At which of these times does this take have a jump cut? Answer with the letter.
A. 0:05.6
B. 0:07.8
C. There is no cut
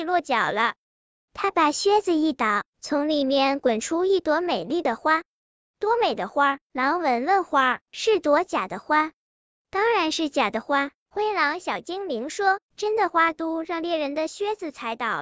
B